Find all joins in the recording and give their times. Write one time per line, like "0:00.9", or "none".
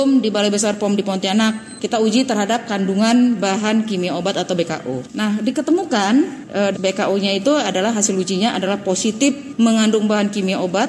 0:06.7